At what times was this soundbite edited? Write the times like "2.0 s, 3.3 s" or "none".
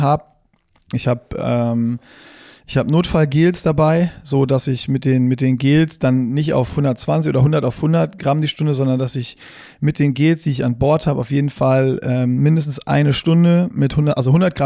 0.9 s